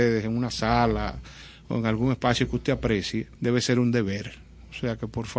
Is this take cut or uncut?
cut